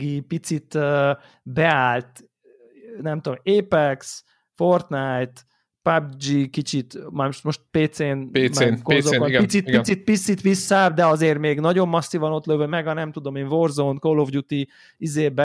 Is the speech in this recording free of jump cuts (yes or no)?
yes